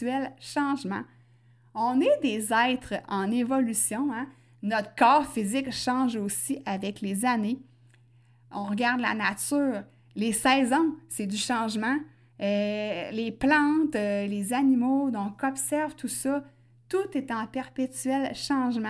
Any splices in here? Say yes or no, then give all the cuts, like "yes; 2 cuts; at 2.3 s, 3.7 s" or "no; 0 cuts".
no; 0 cuts